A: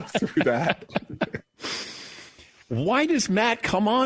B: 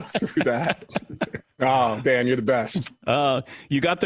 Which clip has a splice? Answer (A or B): B